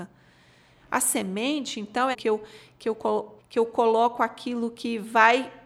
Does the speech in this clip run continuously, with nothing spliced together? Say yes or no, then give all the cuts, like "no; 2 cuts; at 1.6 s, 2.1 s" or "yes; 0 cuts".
no; 2 cuts; at 2.1 s, 3.4 s